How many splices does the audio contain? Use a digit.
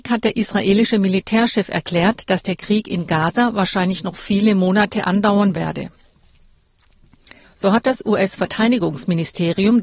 1